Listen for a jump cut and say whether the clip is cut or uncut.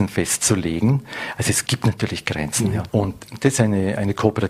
cut